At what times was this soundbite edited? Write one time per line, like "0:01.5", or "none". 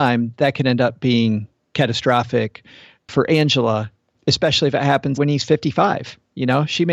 0:05.2

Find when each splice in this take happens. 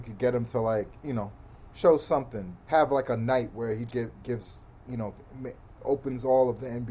0:02.7
0:03.9

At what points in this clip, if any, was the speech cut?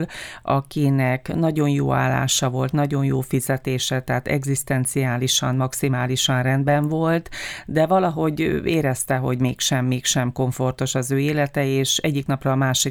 none

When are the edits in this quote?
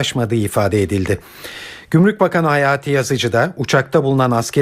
none

